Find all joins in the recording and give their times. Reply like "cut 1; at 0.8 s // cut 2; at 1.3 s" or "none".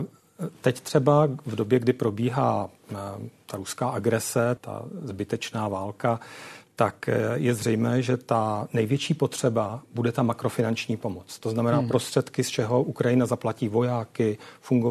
cut 1; at 4.6 s